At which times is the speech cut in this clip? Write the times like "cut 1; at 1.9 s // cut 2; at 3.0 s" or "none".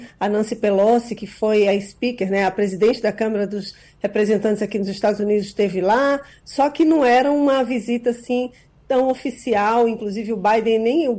none